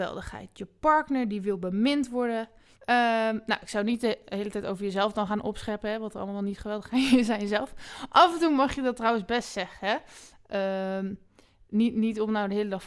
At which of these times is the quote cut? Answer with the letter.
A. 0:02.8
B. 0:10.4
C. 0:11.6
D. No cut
A